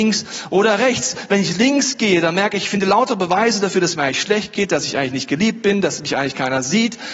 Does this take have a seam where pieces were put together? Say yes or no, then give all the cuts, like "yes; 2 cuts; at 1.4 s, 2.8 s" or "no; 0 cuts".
no; 0 cuts